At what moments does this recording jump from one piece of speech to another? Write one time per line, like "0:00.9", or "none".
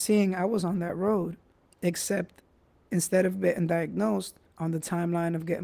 0:04.5